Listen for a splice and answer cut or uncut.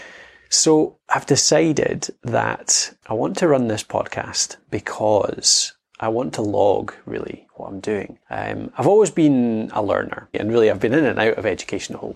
cut